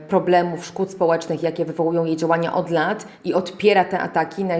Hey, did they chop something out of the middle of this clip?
no; 0 cuts

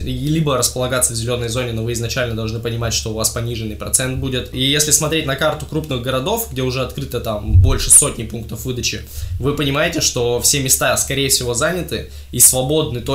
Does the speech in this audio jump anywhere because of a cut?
no; 0 cuts

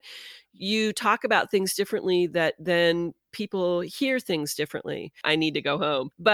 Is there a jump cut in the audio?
yes; 1 cut; at 5.2 s

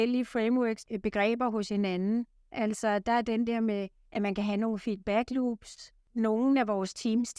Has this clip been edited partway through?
no; 0 cuts

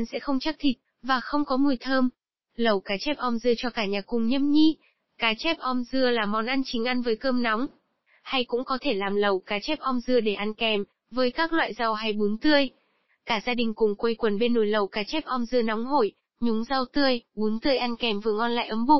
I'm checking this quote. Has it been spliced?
no; 0 cuts

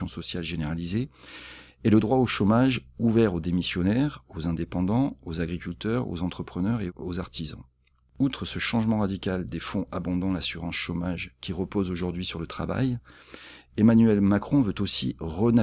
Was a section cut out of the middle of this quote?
no; 0 cuts

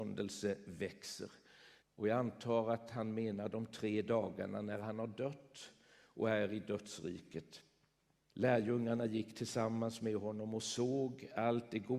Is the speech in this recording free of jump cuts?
no; 2 cuts; at 1.8 s, 8.2 s

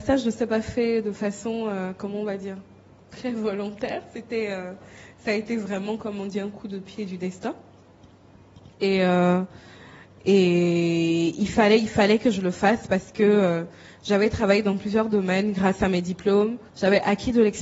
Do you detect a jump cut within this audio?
yes; 1 cut; at 16.7 s

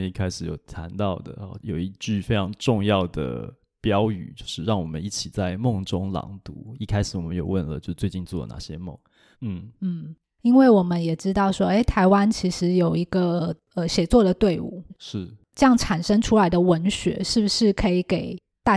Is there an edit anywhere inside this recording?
yes; 3 cuts; at 1.6 s, 9.3 s, 14.9 s

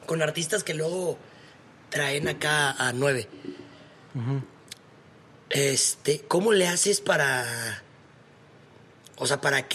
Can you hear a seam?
no; 0 cuts

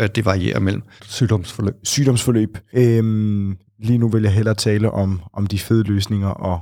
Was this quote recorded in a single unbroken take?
no; 2 cuts; at 1.0 s, 2.7 s

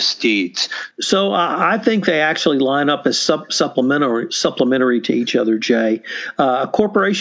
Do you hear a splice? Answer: yes; 1 cut; at 0.9 s

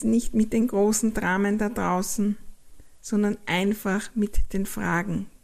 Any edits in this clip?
no; 0 cuts

